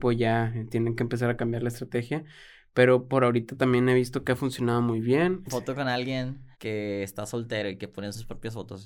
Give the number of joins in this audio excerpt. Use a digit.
2